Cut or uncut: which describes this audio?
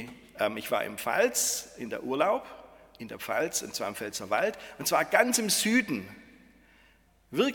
uncut